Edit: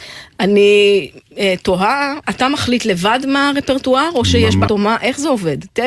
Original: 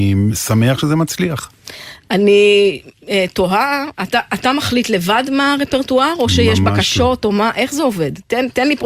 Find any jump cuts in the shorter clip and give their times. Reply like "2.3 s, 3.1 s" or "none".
2.2 s, 4.7 s